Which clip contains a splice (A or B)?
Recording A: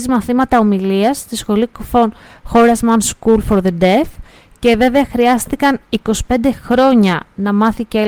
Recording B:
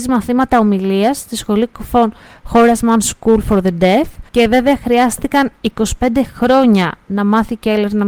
B